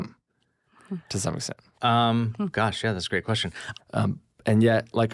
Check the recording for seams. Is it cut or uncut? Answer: cut